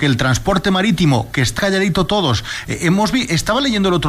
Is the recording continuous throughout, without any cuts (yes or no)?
no